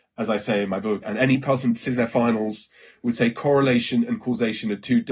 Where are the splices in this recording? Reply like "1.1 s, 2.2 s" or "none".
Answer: 1.0 s